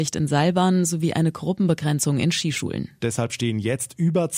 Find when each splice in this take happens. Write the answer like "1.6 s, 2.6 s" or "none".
3.0 s